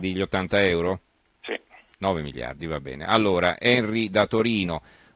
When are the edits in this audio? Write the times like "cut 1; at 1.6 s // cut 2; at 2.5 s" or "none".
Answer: none